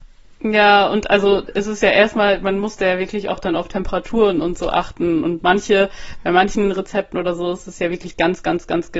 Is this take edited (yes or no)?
no